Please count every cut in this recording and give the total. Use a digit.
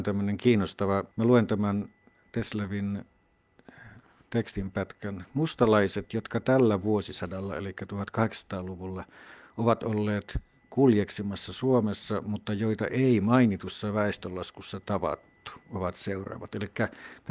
1